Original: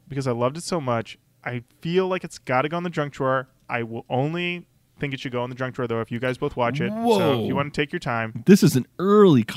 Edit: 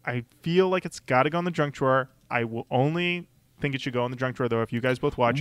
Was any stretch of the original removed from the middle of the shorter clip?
no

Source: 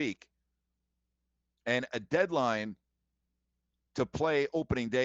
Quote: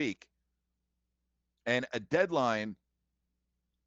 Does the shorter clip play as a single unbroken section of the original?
yes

